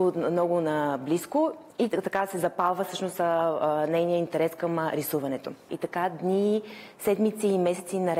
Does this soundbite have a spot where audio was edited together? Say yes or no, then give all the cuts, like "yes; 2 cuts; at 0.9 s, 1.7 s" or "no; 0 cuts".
yes; 2 cuts; at 1.7 s, 5.7 s